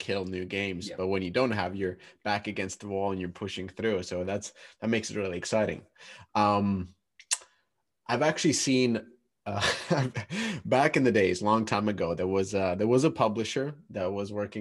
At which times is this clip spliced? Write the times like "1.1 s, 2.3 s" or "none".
none